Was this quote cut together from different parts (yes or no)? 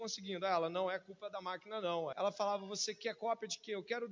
yes